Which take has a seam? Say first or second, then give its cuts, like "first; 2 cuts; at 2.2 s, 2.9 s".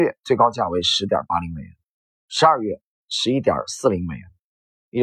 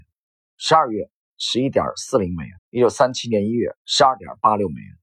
second; 2 cuts; at 2.6 s, 3.8 s